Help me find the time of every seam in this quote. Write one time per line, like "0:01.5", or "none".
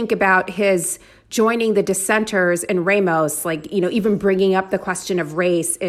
none

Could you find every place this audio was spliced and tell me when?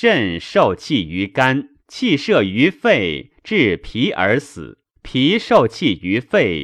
0:01.8
0:05.0

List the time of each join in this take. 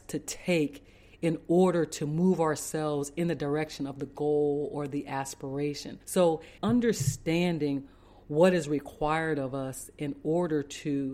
0:06.6

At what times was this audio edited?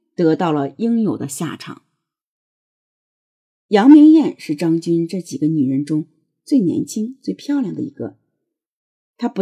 none

